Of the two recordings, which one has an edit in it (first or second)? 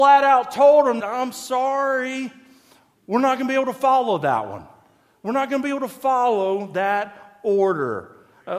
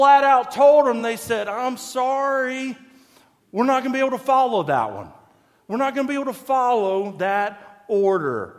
first